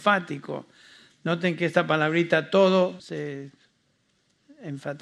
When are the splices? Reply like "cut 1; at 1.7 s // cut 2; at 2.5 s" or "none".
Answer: cut 1; at 3.0 s